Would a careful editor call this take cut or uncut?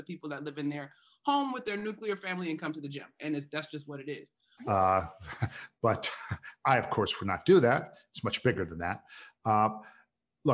cut